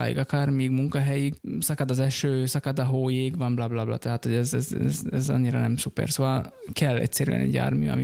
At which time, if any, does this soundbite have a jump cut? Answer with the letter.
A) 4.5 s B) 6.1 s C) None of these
C